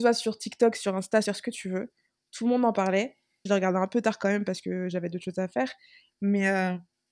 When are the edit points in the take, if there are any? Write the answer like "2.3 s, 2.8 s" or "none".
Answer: 1.2 s, 3.5 s